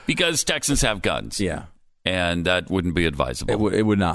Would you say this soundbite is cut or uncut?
uncut